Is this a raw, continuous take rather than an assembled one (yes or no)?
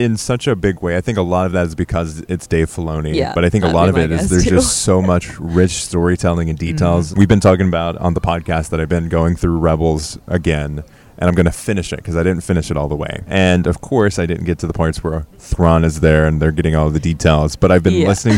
yes